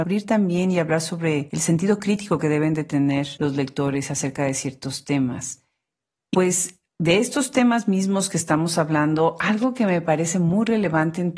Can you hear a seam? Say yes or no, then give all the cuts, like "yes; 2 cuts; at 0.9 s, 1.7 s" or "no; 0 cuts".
yes; 1 cut; at 6.3 s